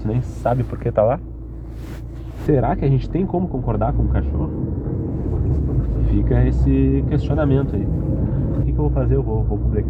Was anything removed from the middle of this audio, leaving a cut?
yes; 2 cuts; at 2.5 s, 8.6 s

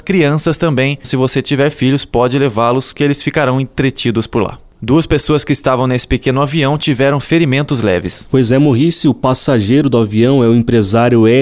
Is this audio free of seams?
no; 2 cuts; at 1.0 s, 4.7 s

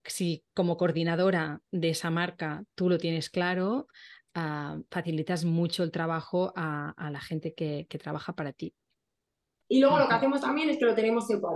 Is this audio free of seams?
no; 1 cut; at 9.6 s

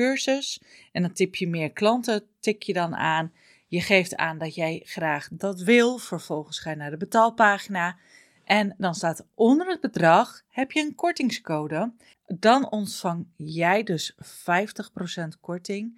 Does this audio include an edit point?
yes; 1 cut; at 12.1 s

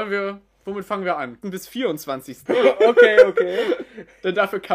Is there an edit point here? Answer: yes; 2 cuts; at 1.4 s, 2.5 s

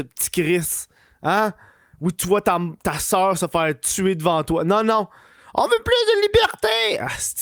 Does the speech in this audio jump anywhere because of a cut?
no; 0 cuts

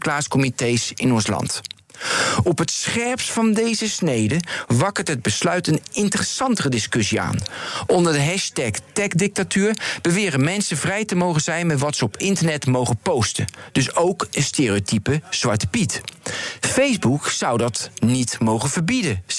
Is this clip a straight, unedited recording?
yes; 0 cuts

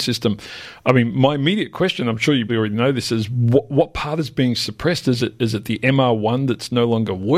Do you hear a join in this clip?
yes; 1 cut; at 2.5 s

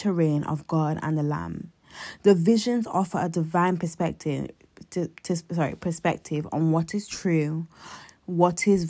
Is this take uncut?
yes; 0 cuts

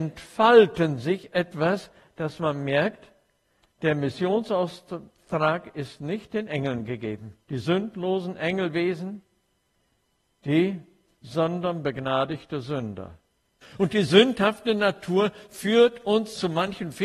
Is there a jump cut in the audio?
yes; 2 cuts; at 7.4 s, 13.6 s

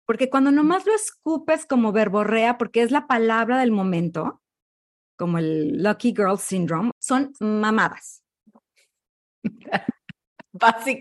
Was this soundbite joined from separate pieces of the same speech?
yes; 1 cut; at 6.9 s

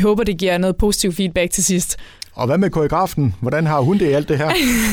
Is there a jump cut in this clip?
no; 0 cuts

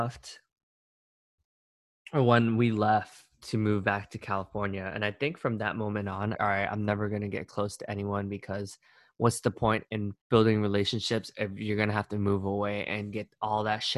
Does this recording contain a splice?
yes; 2 cuts; at 6.3 s, 10.2 s

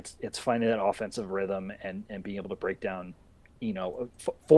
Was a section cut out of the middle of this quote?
no; 0 cuts

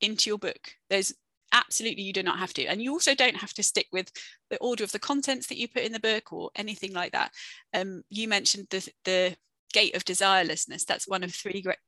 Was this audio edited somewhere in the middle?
no; 0 cuts

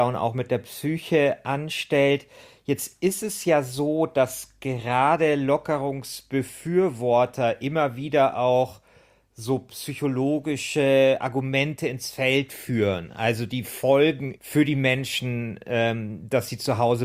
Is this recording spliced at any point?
yes; 1 cut; at 14.4 s

